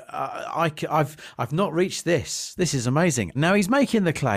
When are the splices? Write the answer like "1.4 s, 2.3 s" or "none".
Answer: 3.3 s